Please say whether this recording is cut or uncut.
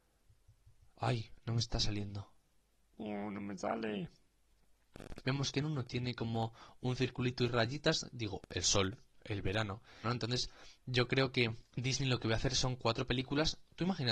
cut